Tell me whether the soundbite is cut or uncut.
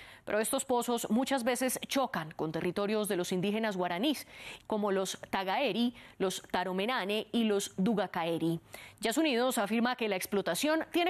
cut